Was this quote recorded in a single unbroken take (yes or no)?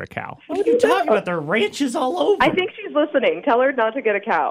yes